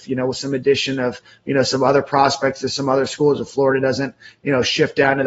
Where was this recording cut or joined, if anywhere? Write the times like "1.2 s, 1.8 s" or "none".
none